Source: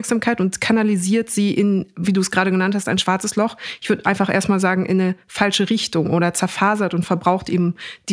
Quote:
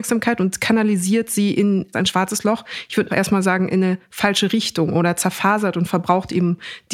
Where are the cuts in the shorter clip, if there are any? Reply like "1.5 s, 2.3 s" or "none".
1.9 s, 3.1 s